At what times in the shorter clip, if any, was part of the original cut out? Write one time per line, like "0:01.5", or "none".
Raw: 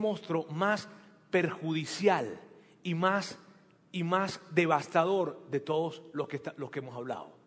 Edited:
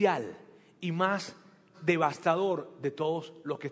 0:01.7

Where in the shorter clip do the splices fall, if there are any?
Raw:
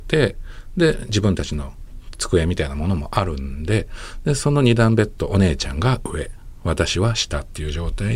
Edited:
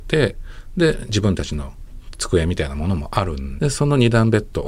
0:03.6

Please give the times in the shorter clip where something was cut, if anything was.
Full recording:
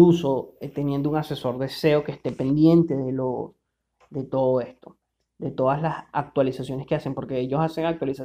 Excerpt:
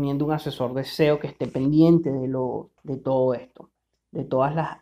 0:02.8

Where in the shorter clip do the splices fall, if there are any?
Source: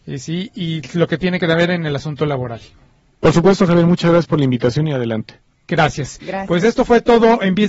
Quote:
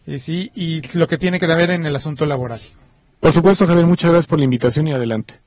none

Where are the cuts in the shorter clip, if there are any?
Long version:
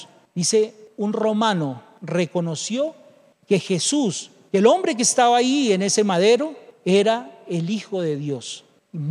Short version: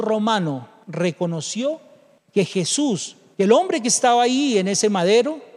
none

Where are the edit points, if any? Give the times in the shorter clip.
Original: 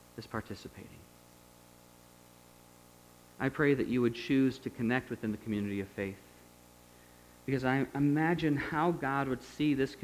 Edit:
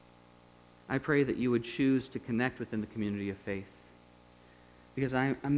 none

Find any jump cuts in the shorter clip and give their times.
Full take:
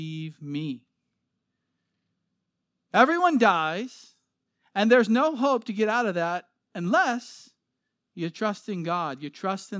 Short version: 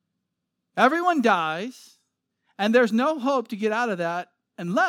none

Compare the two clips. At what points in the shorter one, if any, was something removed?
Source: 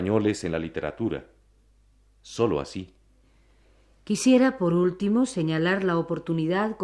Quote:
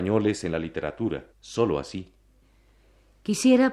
0:01.3

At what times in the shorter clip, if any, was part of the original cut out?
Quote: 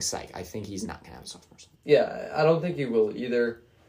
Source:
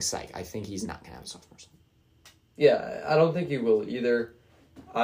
0:01.7

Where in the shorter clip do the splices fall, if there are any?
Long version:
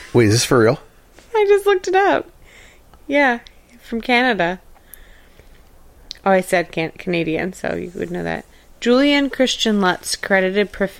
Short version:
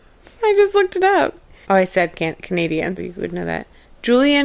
0:01.6
0:03.0

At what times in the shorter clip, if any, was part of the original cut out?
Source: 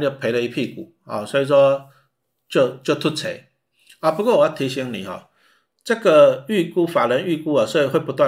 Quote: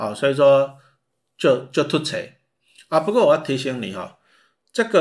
none

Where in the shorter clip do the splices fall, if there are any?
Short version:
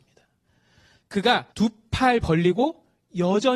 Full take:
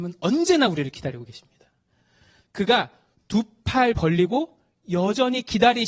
0:01.5

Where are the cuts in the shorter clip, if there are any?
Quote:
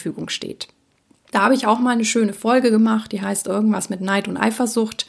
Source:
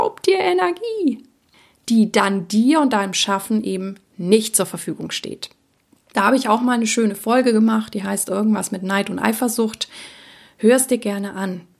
none

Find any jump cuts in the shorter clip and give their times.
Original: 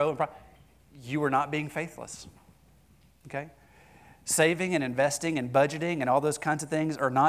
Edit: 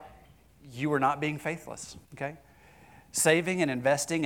0:02.0

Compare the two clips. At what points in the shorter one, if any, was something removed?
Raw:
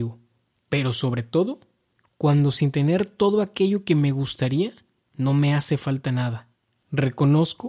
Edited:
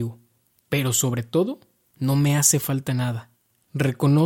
0:01.9

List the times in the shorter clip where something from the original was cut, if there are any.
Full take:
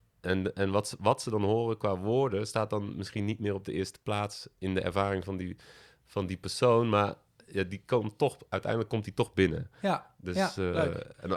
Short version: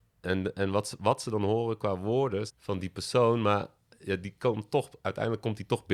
0:02.5

